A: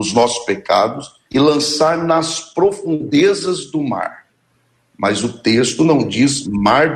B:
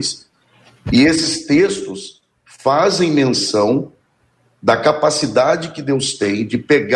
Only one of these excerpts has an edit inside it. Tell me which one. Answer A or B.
A